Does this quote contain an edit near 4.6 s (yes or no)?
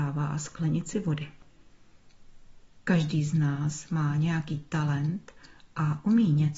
no